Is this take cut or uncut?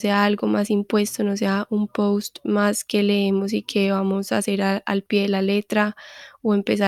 uncut